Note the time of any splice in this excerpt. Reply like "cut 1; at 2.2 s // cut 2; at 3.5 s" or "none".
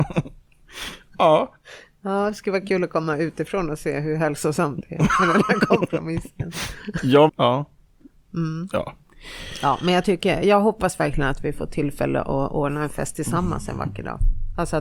cut 1; at 7.3 s